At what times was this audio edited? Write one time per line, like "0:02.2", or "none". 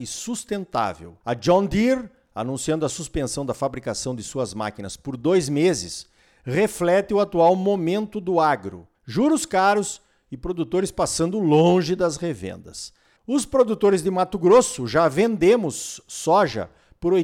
0:01.2
0:08.9
0:13.2

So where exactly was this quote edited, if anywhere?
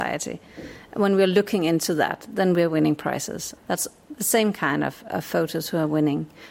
0:03.6

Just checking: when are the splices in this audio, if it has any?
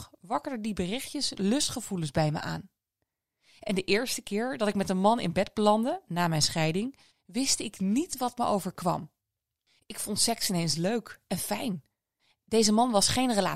0:07.1

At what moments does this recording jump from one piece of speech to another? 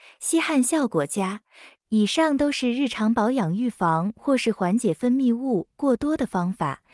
0:01.7

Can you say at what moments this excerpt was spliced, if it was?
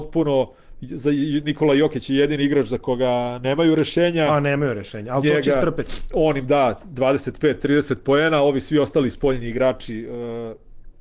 none

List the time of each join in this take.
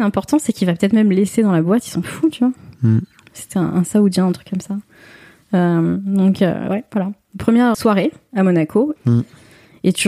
0:07.7
0:09.0

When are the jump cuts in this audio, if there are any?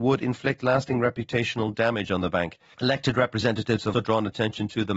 0:02.7
0:03.9

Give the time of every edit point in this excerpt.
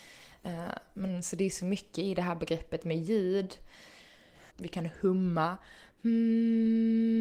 0:04.5

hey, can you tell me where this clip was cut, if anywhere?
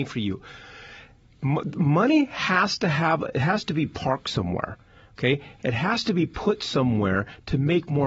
none

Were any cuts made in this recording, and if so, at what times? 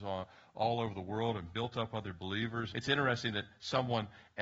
0:02.7

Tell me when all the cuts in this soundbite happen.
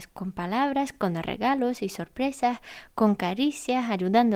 none

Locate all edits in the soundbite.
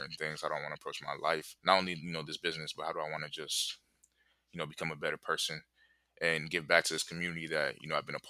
0:01.6

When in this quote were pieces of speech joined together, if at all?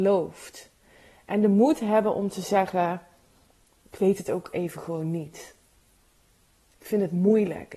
none

